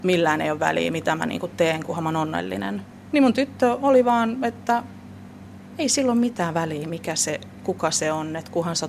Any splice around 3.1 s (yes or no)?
yes